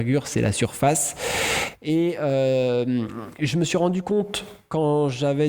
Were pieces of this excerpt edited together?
no; 0 cuts

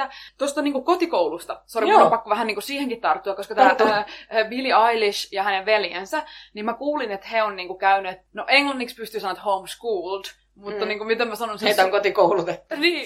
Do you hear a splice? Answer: no; 0 cuts

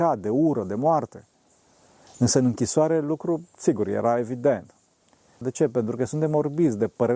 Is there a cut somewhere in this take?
yes; 2 cuts; at 2.0 s, 5.4 s

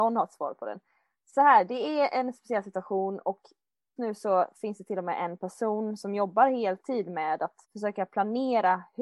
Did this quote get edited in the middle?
yes; 2 cuts; at 4.0 s, 7.6 s

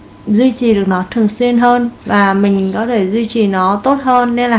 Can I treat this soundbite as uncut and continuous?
no; 1 cut; at 2.0 s

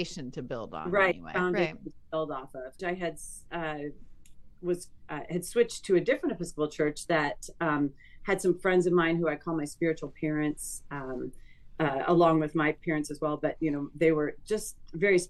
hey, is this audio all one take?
no; 1 cut; at 2.8 s

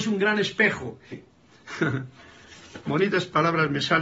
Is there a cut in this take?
yes; 1 cut; at 1.1 s

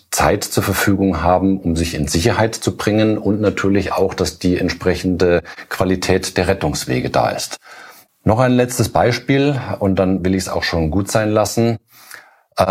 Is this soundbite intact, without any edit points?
no; 1 cut; at 8.1 s

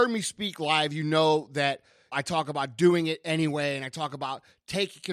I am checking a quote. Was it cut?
yes; 1 cut; at 2.1 s

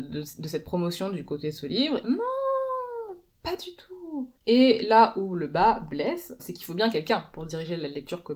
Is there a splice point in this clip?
yes; 3 cuts; at 2.0 s, 4.4 s, 6.4 s

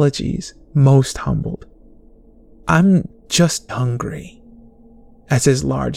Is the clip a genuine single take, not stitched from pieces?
no; 1 cut; at 3.7 s

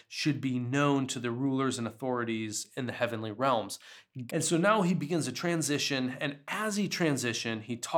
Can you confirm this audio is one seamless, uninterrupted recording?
no; 1 cut; at 4.3 s

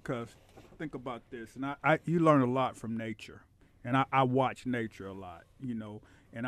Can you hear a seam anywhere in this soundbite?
yes; 1 cut; at 1.8 s

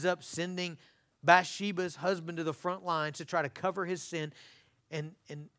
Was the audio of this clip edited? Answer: no; 0 cuts

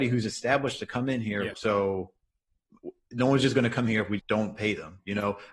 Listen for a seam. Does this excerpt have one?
yes; 2 cuts; at 1.5 s, 4.2 s

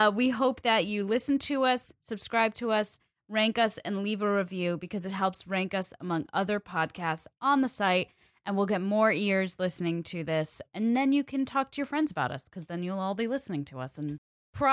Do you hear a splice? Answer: no; 0 cuts

